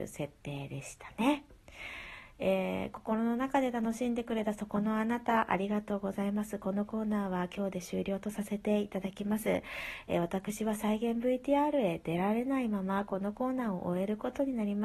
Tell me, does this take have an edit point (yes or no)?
no